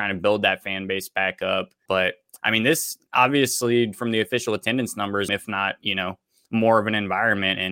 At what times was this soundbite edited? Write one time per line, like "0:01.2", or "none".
0:01.9
0:05.3